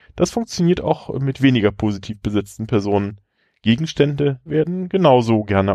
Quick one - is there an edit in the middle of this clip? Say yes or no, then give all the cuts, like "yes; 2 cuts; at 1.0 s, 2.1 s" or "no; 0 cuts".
yes; 1 cut; at 4.5 s